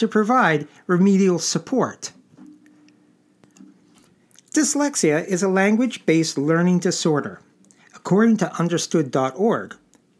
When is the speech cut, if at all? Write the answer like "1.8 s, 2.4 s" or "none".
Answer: none

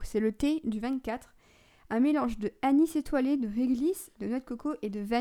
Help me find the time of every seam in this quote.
4.1 s

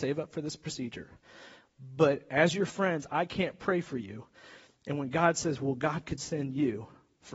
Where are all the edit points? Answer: none

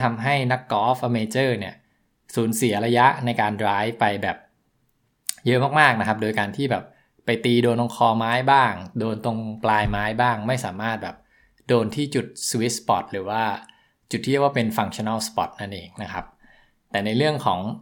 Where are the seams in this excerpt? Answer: none

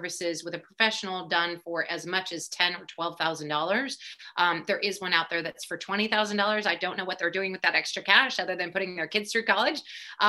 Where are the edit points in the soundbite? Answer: none

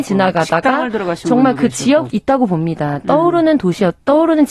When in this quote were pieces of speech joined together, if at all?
2.1 s

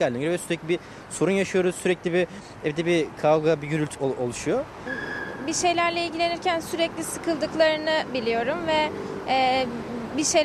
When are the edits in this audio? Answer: 3.9 s

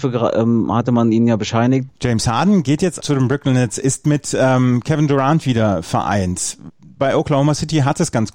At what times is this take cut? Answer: 1.9 s, 3.0 s, 6.7 s

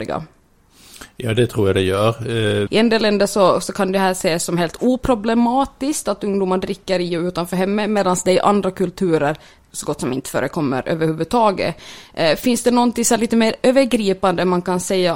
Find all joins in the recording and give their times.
2.7 s

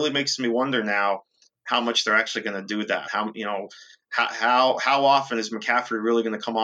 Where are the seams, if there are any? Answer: none

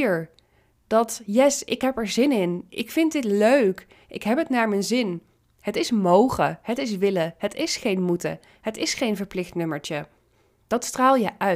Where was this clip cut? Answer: none

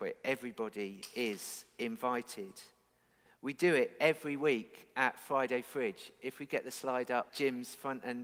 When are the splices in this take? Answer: 3.3 s, 7.3 s

